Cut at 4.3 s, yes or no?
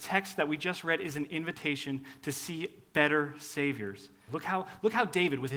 yes